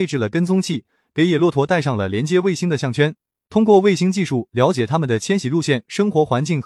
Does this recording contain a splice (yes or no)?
no